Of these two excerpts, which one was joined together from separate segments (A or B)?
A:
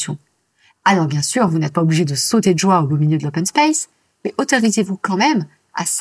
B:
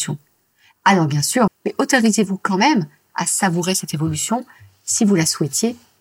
B